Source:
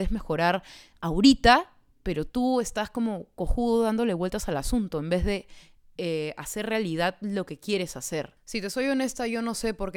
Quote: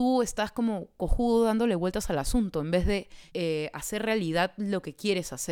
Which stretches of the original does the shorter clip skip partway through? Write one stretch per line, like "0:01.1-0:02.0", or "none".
0:05.7-0:05.9